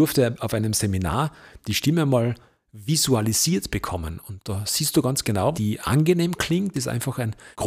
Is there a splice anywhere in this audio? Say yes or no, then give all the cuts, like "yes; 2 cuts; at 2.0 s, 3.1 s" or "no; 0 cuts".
yes; 2 cuts; at 5.5 s, 6.7 s